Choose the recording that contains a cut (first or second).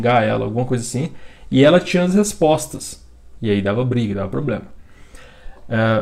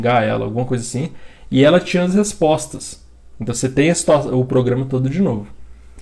first